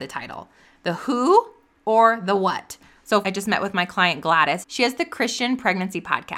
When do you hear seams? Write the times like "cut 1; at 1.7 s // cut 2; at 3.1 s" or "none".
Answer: cut 1; at 3.2 s // cut 2; at 4.6 s